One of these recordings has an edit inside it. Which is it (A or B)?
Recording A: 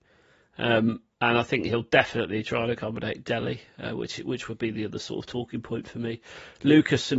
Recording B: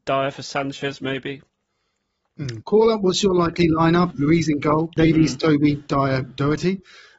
B